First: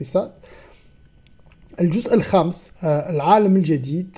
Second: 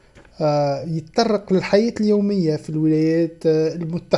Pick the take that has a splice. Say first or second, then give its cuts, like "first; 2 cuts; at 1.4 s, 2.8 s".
first; 1 cut; at 2.8 s